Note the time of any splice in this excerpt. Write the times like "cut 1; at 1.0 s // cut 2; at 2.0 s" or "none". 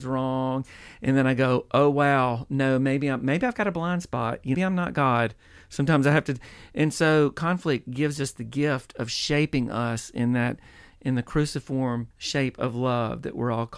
cut 1; at 4.5 s // cut 2; at 12.1 s